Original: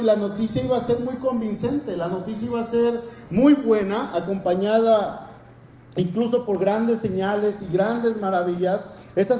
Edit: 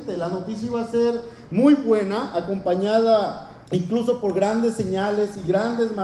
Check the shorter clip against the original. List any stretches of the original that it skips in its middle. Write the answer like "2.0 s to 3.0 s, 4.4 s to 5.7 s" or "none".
5.4 s to 5.9 s